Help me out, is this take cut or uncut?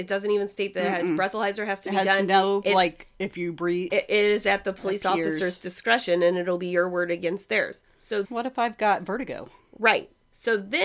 cut